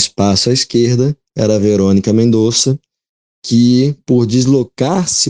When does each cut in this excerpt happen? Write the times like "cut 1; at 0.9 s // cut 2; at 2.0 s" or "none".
none